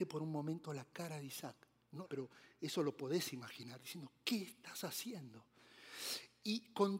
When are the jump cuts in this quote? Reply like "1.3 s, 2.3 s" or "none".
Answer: 2.0 s